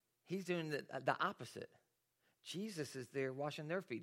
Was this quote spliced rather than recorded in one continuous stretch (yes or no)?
no